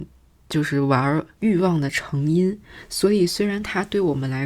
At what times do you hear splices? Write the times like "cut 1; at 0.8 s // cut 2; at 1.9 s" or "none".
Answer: cut 1; at 1.4 s

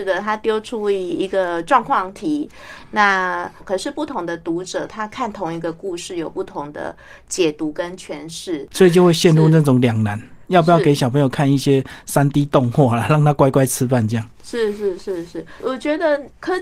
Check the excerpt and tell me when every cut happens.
cut 1; at 3.6 s // cut 2; at 8.7 s

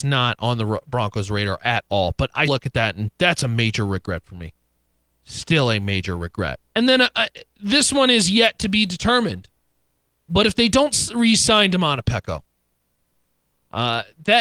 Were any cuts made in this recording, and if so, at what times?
cut 1; at 2.5 s // cut 2; at 6.7 s

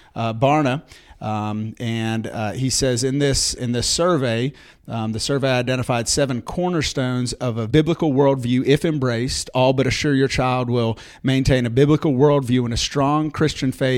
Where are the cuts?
cut 1; at 3.6 s

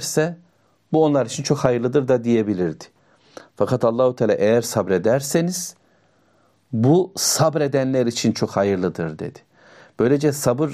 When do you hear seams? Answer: none

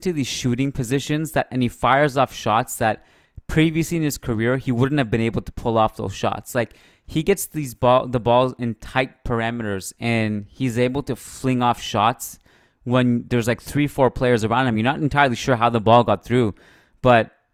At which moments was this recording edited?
none

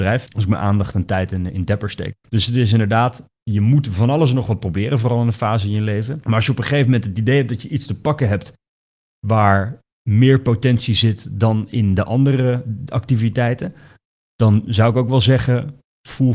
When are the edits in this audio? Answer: cut 1; at 2.2 s

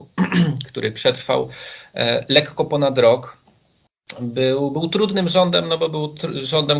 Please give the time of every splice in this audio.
none

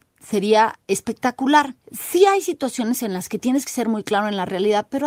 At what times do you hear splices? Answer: cut 1; at 1.8 s

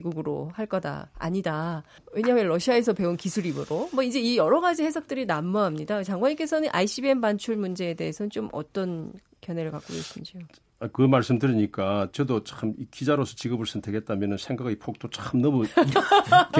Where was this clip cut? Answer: cut 1; at 2.0 s

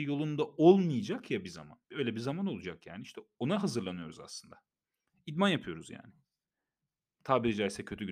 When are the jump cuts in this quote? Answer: cut 1; at 1.8 s

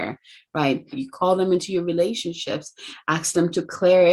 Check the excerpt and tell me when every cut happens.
cut 1; at 0.9 s

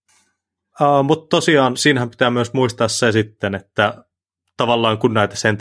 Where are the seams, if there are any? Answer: cut 1; at 1.7 s

